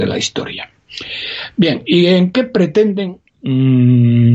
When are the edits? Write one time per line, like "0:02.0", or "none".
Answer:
0:03.3